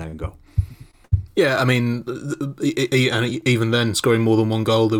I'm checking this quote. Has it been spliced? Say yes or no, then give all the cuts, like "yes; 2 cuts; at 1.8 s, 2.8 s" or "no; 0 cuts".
no; 0 cuts